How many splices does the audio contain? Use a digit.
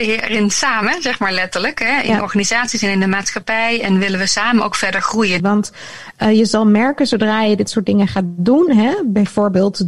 2